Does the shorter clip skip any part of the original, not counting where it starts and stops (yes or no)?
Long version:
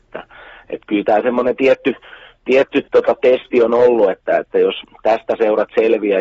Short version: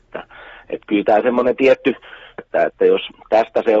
yes